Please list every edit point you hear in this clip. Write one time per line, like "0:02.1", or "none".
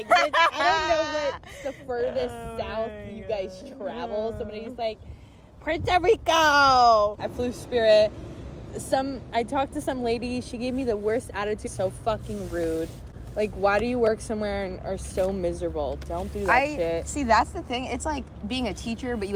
0:07.2
0:11.7